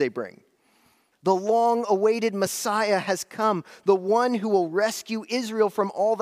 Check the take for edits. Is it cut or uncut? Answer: cut